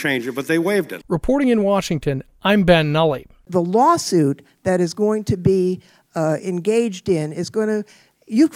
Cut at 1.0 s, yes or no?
yes